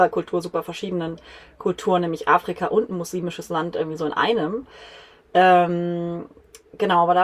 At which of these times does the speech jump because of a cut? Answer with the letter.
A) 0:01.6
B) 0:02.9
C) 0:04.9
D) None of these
D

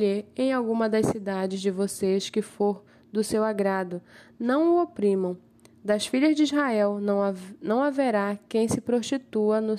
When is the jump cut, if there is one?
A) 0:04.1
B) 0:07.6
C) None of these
C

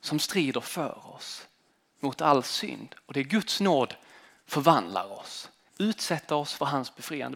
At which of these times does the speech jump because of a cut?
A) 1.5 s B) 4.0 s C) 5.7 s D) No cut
C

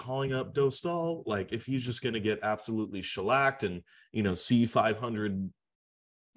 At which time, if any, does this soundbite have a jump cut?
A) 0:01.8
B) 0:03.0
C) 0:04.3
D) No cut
D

